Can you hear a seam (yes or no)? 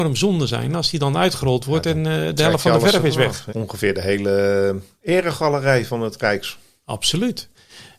yes